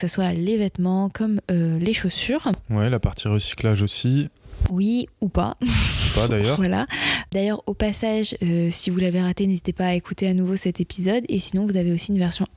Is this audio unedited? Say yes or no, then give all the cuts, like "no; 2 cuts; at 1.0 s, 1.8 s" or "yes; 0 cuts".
yes; 0 cuts